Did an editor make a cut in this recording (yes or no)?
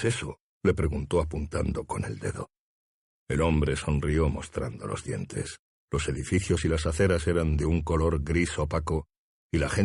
yes